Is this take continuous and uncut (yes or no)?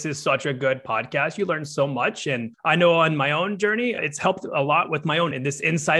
yes